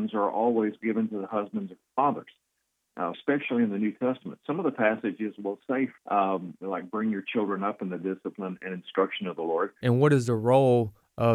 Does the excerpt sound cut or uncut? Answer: cut